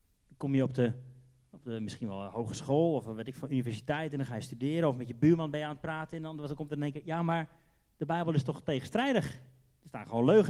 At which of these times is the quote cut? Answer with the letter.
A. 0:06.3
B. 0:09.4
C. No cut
C